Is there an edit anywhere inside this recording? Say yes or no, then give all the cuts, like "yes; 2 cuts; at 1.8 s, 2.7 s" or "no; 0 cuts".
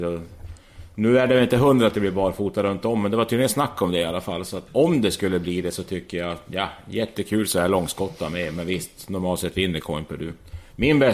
yes; 1 cut; at 4.7 s